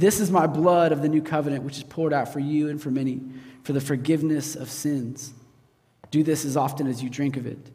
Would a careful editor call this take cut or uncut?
uncut